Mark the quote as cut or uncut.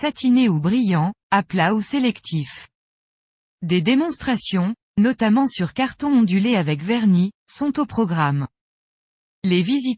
uncut